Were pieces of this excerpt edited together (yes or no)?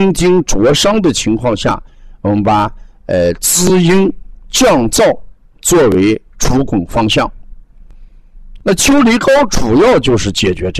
yes